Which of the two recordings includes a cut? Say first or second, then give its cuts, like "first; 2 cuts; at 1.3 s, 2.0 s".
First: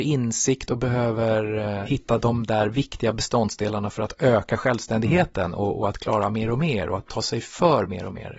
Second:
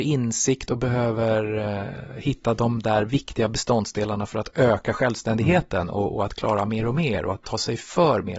first; 1 cut; at 1.8 s